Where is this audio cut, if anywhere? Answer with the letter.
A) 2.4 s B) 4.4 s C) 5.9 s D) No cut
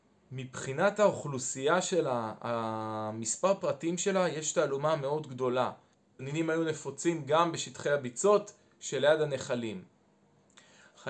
C